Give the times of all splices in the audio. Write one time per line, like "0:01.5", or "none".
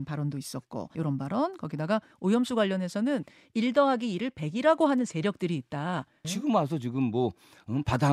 0:00.9
0:06.2